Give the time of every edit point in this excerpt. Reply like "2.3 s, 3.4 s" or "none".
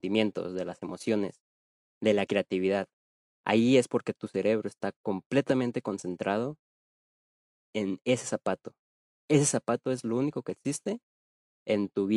3.3 s